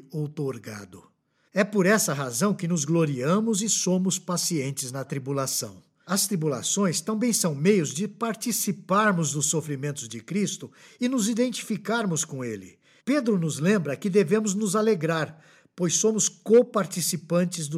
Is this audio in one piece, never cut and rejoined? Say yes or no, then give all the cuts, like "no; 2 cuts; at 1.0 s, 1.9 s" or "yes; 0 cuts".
yes; 0 cuts